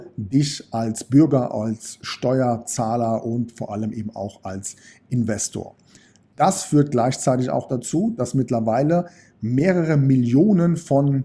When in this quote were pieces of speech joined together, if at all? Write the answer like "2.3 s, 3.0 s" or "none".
none